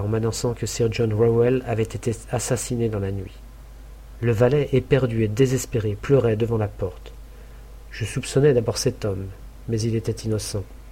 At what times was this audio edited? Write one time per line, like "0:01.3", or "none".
0:04.2